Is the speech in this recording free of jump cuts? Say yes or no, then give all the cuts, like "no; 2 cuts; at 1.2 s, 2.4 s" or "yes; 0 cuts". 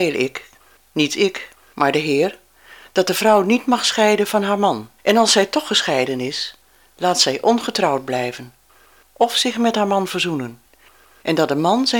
no; 1 cut; at 5.0 s